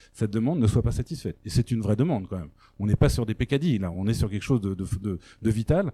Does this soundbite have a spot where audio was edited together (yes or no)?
no